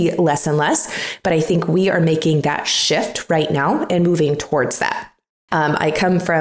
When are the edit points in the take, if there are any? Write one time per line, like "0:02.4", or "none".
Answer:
0:05.5